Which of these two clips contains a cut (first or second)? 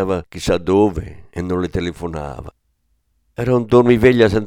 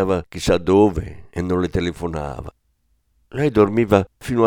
first